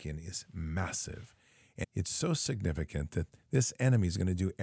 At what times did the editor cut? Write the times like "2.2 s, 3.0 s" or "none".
1.8 s